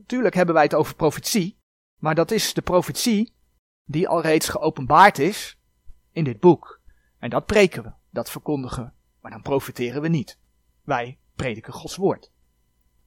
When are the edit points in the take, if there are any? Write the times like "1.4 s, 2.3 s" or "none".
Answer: none